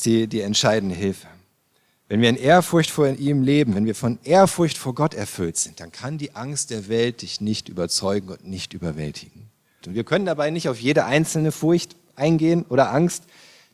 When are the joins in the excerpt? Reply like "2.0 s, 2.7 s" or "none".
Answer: 9.8 s